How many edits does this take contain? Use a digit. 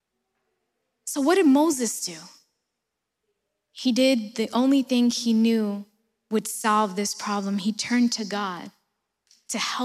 0